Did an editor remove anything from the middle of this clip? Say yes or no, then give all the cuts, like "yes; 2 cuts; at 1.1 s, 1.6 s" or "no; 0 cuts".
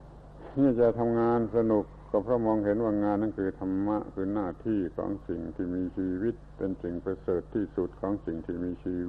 no; 0 cuts